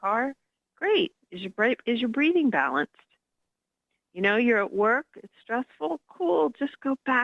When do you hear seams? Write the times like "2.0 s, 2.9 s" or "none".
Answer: none